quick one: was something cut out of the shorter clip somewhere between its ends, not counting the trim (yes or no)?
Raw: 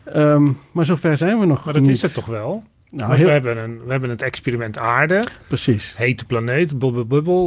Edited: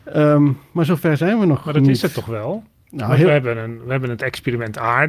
no